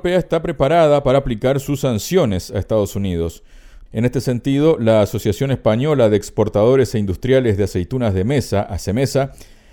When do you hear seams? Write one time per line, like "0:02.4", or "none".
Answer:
0:03.9